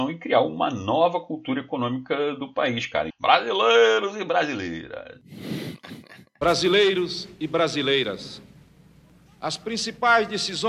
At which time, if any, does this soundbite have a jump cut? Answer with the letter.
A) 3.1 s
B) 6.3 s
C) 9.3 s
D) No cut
A